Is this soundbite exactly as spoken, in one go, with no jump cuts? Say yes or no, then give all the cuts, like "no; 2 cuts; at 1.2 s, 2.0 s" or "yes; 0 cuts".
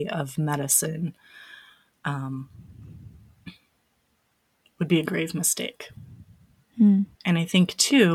no; 1 cut; at 7.1 s